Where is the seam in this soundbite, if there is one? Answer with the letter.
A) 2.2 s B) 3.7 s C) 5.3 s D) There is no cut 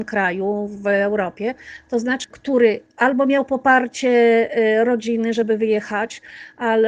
A